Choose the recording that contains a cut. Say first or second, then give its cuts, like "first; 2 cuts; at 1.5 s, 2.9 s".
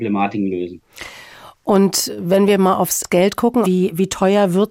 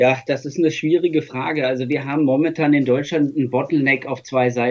first; 1 cut; at 3.6 s